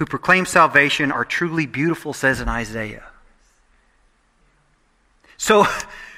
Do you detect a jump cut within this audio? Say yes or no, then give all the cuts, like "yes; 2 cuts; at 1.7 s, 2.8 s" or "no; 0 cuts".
no; 0 cuts